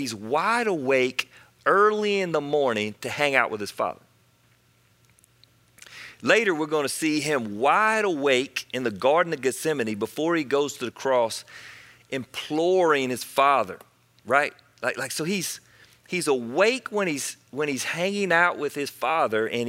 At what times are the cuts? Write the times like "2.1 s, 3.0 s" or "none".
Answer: none